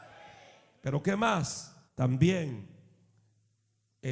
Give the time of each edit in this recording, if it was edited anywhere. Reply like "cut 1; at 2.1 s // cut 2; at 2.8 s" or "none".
cut 1; at 1.9 s